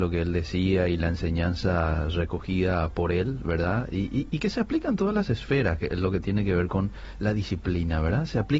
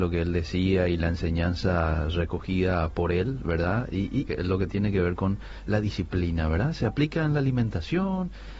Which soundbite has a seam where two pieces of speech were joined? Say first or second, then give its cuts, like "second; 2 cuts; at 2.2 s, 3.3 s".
second; 1 cut; at 4.3 s